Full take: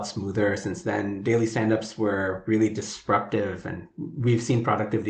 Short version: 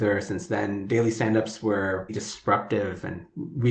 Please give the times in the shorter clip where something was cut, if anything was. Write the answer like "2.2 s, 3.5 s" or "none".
2.1 s